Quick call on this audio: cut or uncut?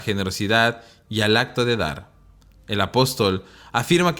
uncut